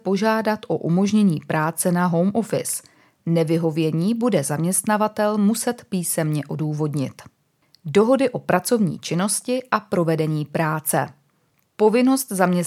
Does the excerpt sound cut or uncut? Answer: uncut